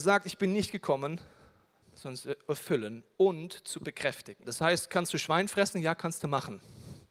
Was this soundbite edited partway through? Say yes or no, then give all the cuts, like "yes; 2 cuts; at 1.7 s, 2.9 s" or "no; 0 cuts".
yes; 2 cuts; at 1.8 s, 4.4 s